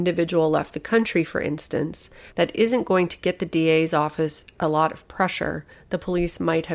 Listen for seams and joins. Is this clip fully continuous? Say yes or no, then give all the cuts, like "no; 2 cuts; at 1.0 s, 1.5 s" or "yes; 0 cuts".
no; 1 cut; at 2.3 s